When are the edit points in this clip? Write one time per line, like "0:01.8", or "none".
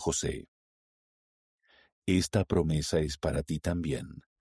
none